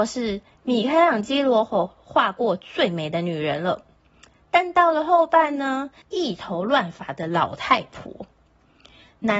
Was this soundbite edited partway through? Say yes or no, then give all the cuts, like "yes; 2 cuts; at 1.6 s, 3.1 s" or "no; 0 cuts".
yes; 1 cut; at 6.0 s